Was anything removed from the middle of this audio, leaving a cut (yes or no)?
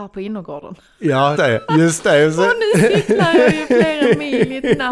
yes